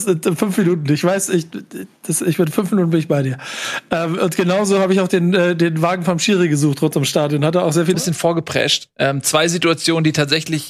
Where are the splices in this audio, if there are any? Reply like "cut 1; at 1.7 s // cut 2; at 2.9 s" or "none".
cut 1; at 7.9 s